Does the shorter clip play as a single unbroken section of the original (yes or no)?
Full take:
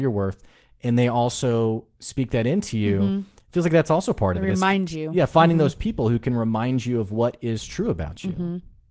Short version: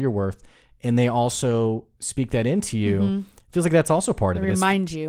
yes